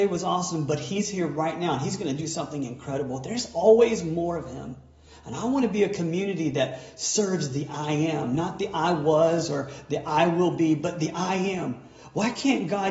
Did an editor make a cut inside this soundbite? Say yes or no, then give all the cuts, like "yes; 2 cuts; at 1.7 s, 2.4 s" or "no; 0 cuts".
no; 0 cuts